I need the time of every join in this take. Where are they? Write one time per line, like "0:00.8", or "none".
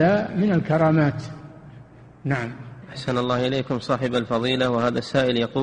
0:02.8